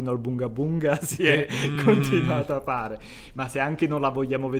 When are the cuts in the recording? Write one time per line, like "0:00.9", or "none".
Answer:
none